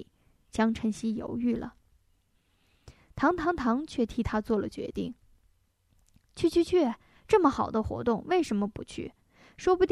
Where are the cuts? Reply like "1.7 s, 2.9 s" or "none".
none

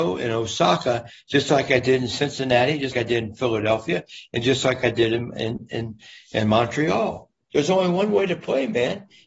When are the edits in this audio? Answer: 2.9 s

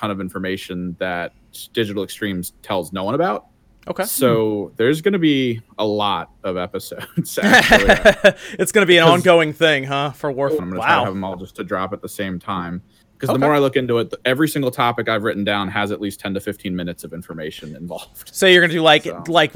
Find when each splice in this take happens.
10.6 s

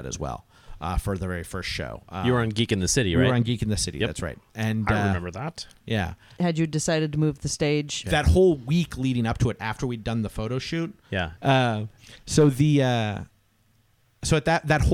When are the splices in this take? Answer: 6.4 s, 8.0 s, 11.4 s

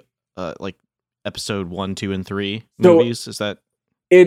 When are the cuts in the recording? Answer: none

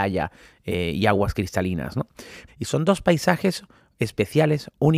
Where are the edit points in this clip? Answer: 2.5 s

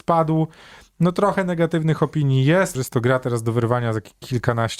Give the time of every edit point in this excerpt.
2.7 s

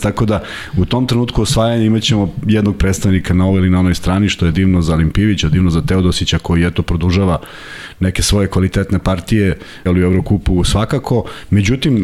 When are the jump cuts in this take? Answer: 4.5 s, 9.9 s

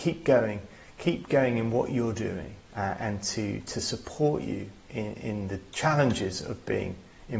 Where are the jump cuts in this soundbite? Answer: 2.7 s

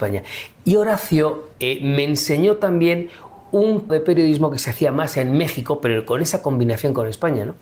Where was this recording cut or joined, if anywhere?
1.5 s, 3.9 s

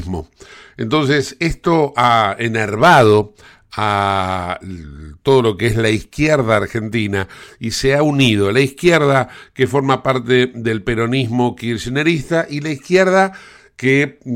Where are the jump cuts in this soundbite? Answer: none

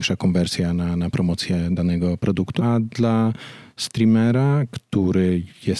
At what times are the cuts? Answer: none

